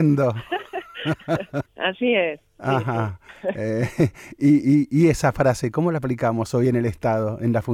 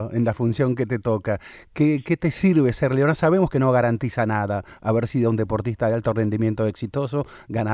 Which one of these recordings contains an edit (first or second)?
first